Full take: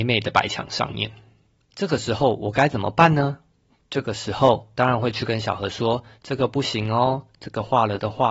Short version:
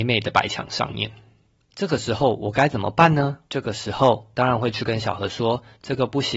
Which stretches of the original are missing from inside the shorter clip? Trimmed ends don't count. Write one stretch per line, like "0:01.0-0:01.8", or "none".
0:03.5-0:03.9